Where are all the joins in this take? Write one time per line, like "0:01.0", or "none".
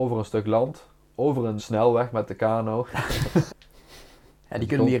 0:01.6
0:03.5

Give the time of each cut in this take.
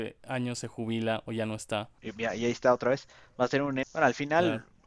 0:02.0
0:03.8

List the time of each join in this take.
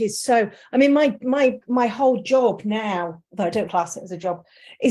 0:03.7

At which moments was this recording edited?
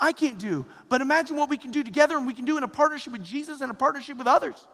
none

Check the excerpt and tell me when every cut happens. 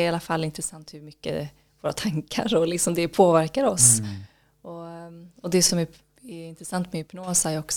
none

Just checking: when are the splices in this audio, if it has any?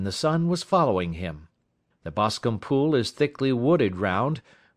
0:01.9

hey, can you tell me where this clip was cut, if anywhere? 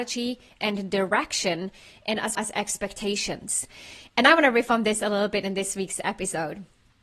0:02.3

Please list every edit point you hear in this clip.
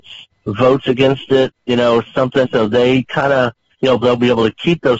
0:02.4
0:04.0

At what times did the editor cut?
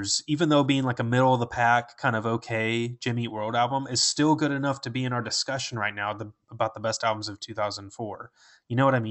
none

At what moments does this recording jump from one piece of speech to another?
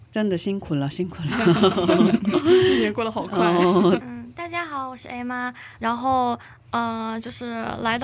0:04.0
0:05.8

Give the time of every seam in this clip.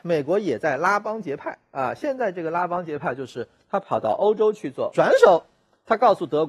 0:04.9

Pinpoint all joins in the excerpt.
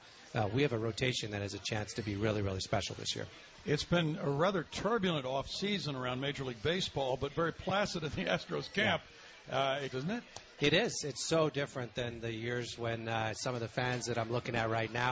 0:09.9

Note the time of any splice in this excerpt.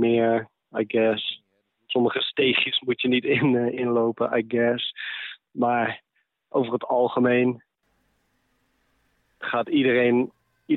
none

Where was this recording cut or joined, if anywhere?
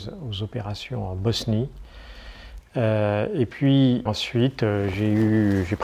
0:02.6
0:04.1

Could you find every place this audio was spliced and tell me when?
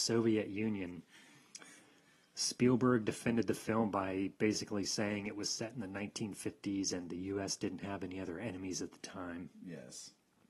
none

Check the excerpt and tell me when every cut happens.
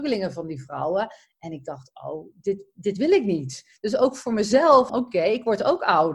0:04.9

